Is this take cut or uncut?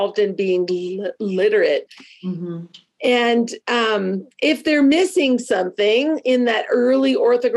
uncut